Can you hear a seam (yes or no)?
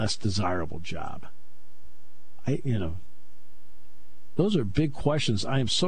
no